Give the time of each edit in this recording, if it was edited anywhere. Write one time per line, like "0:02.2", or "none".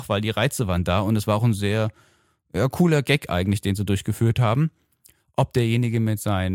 none